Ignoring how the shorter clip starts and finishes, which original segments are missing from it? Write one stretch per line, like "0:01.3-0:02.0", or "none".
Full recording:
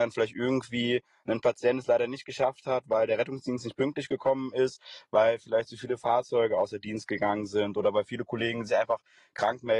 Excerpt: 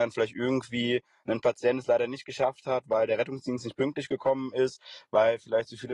none